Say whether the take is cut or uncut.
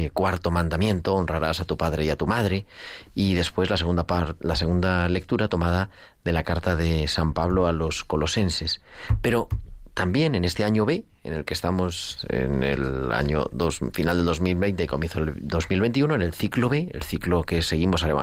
uncut